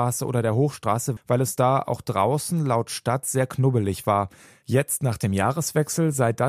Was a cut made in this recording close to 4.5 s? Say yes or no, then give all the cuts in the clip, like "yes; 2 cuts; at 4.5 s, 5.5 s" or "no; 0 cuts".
no; 1 cut; at 1.2 s